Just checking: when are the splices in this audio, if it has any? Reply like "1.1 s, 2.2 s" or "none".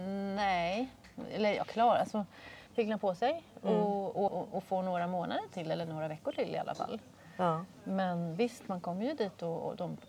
2.7 s, 4.3 s